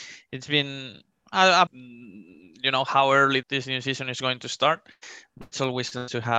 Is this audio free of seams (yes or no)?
no